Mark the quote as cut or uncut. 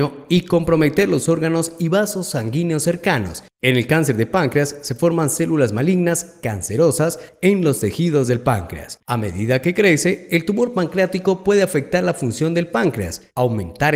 cut